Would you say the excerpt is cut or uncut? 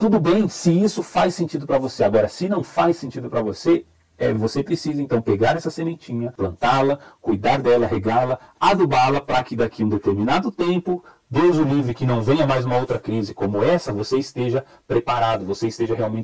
uncut